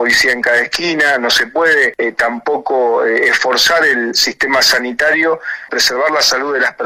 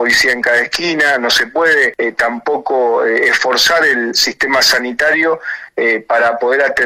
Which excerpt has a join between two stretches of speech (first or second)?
first